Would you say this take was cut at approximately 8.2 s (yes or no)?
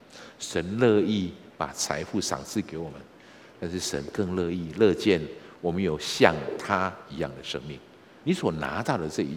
yes